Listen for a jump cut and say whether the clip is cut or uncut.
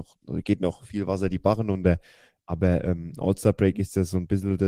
uncut